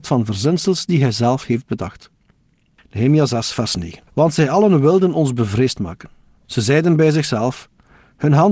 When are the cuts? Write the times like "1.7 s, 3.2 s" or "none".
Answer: 4.1 s

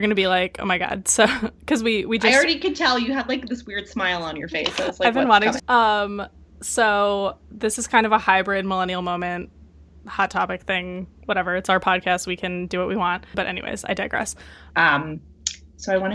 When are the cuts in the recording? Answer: 5.6 s, 13.3 s, 14.7 s

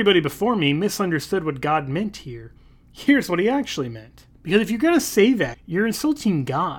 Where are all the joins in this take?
4.3 s, 5.5 s

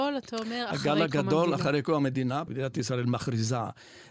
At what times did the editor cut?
2.5 s

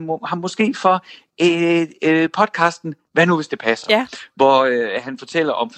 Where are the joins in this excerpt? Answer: none

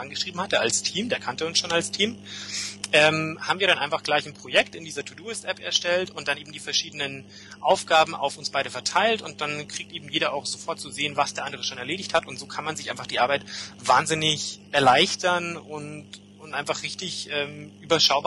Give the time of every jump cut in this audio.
14.7 s

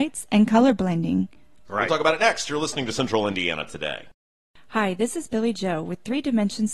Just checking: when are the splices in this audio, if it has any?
1.7 s

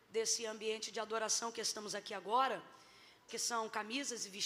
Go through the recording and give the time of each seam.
3.3 s

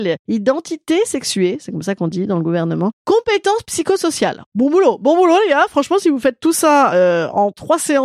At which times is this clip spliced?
none

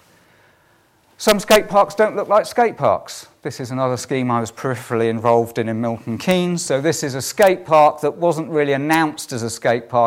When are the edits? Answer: none

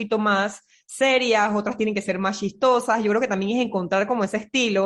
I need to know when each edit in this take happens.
none

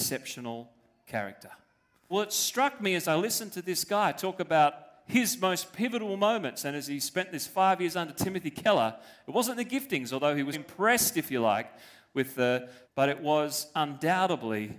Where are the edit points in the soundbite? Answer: 2.1 s, 10.5 s, 12.8 s

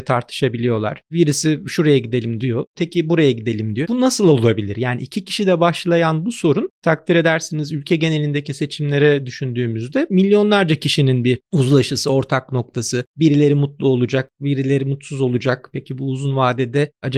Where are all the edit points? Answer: 3.8 s

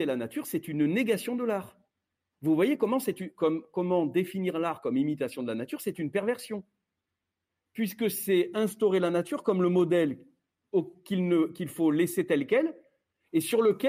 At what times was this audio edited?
none

